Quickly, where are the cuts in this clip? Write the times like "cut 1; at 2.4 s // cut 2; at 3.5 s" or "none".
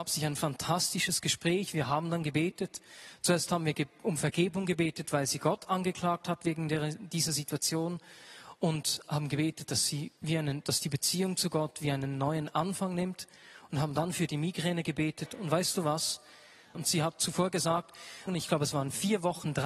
cut 1; at 16.7 s // cut 2; at 18.3 s

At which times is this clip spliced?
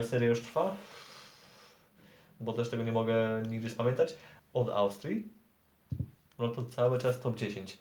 cut 1; at 4.4 s

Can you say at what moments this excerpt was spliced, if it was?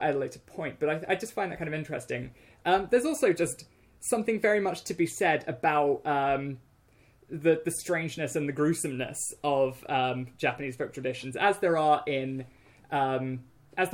none

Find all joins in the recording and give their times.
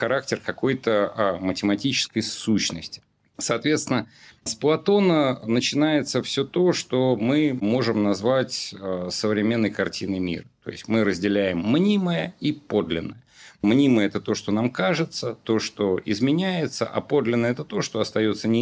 none

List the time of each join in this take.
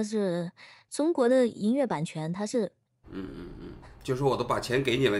cut 1; at 3.0 s

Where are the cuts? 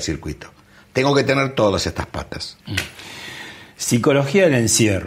none

